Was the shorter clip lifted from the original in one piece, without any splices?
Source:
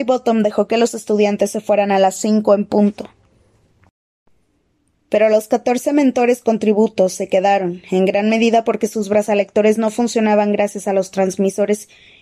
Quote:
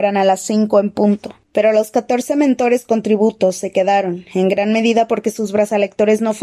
no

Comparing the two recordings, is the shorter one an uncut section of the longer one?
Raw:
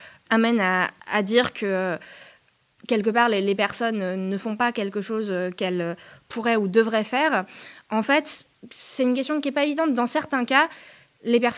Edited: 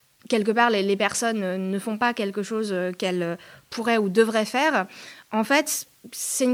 yes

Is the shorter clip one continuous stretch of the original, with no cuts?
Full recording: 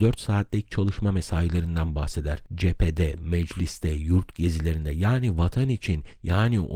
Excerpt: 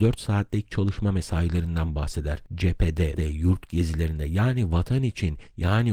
no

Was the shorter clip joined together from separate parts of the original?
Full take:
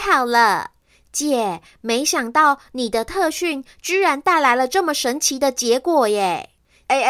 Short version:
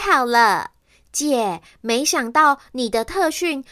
no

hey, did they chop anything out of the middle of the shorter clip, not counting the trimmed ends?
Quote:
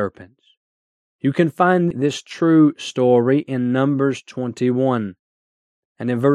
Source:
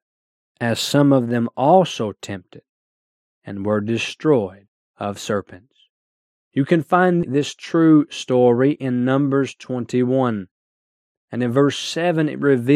no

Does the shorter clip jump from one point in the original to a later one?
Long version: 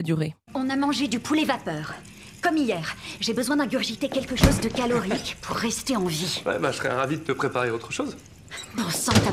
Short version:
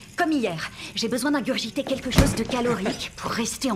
no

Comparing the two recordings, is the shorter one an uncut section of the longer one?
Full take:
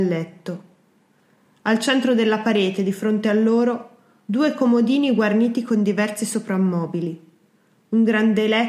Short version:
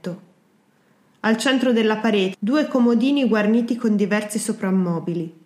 no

